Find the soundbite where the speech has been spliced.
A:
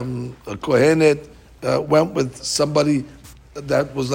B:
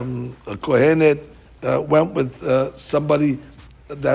A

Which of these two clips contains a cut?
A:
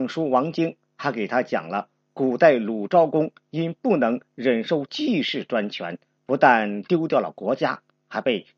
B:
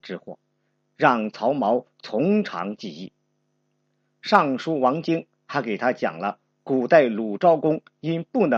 A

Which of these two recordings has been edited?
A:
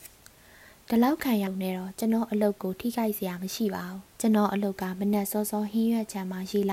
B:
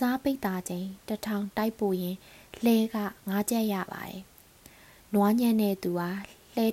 A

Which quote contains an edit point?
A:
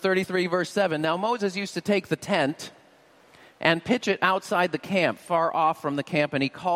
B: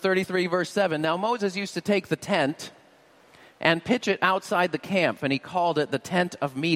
B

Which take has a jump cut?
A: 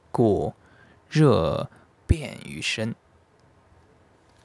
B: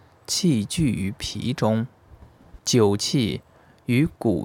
B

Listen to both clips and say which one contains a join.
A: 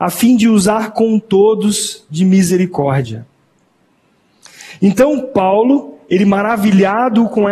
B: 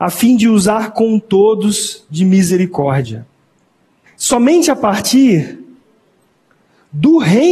B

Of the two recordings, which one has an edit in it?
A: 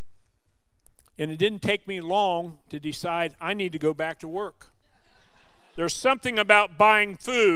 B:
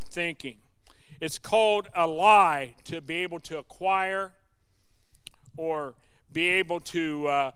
A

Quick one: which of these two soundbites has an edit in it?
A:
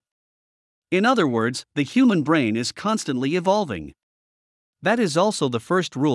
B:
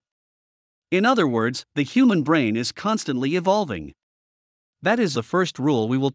B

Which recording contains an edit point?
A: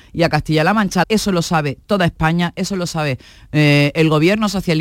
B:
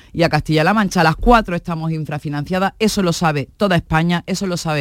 A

